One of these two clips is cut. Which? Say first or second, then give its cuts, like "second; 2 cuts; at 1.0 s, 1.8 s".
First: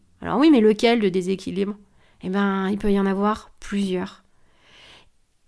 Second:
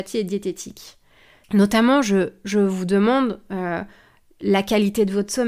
second; 1 cut; at 1.4 s